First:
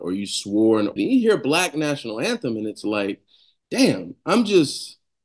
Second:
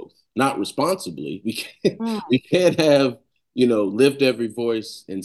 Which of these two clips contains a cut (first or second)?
first